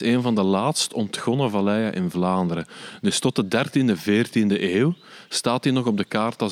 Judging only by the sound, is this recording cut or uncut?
uncut